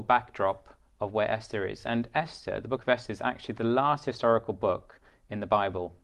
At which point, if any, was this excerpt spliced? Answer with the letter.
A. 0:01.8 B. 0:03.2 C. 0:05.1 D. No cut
D